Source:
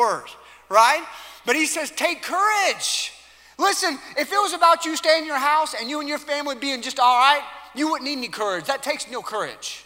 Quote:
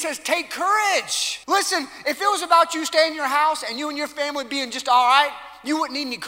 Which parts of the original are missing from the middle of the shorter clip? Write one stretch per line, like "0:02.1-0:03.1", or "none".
0:03.2-0:03.5

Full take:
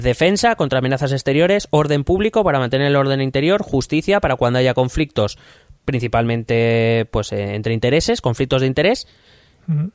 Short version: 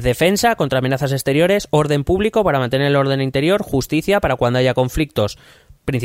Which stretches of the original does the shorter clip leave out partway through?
none

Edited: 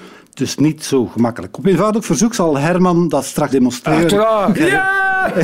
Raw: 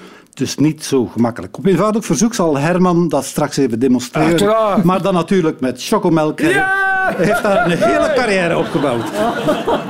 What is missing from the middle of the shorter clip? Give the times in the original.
0:03.5-0:03.8
0:04.8-0:06.4

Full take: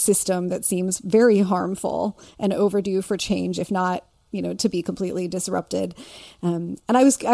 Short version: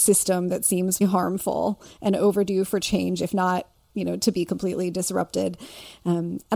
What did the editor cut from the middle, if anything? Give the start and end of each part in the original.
0:01.0-0:01.4

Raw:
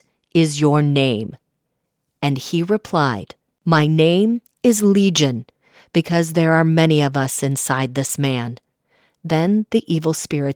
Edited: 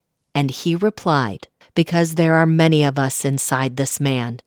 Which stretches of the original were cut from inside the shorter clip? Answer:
0:03.5-0:05.8

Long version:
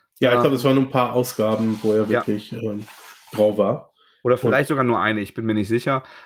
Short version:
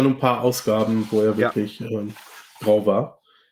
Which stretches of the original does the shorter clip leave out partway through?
none

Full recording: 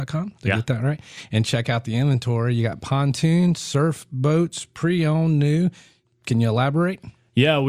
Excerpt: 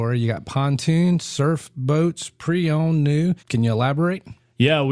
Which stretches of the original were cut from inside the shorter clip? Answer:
0:05.8-0:06.2

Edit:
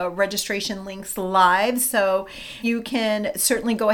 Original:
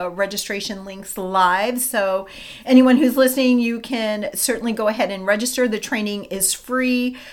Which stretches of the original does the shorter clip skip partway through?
0:02.6-0:03.6

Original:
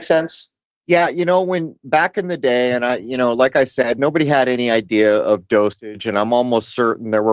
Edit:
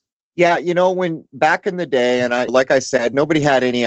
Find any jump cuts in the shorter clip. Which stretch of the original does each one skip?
0:03.0-0:03.3

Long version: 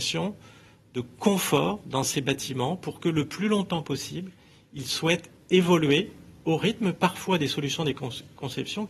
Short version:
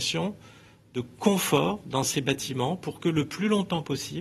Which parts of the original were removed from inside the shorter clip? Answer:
none

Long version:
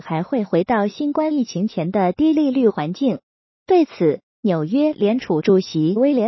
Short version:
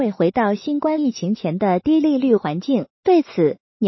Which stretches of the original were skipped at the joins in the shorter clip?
0:03.3-0:03.6

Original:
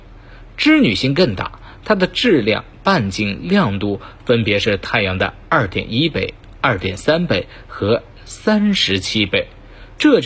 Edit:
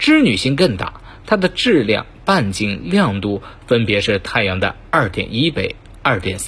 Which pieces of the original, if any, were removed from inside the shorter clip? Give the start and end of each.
none

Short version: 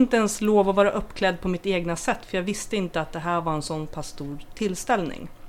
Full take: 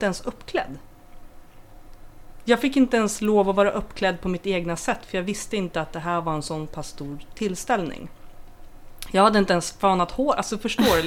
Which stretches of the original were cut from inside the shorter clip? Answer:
none

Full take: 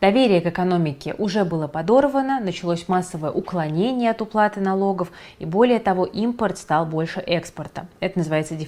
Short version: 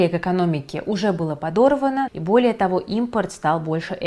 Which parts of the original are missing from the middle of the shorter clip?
0:02.4-0:05.3

